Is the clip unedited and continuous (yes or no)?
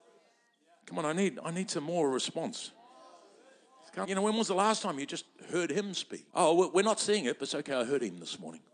no